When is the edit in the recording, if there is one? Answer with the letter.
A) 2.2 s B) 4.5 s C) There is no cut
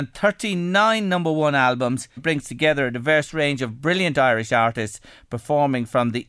A